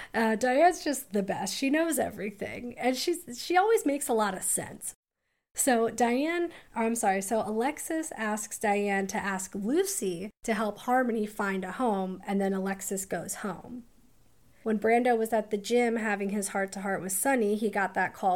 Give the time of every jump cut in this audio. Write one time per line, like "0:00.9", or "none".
none